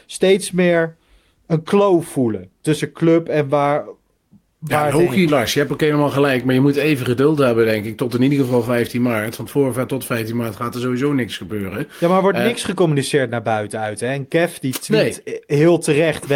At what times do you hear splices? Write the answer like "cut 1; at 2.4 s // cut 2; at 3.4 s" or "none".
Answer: cut 1; at 5.3 s